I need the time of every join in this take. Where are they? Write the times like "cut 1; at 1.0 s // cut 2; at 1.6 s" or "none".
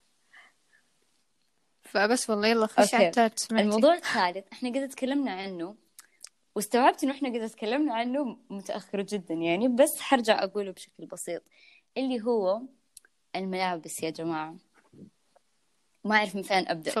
none